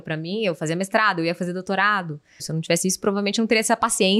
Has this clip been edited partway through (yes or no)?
yes